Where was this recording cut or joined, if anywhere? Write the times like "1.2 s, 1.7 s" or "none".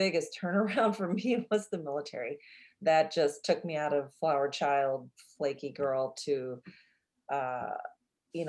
none